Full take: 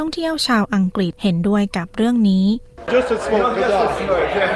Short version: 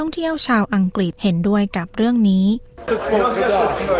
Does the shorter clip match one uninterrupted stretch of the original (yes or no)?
no